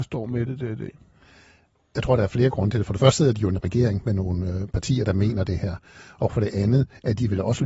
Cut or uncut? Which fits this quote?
uncut